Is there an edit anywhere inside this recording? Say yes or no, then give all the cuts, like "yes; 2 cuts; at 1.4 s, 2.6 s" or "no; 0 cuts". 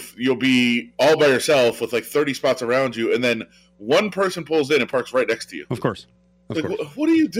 no; 0 cuts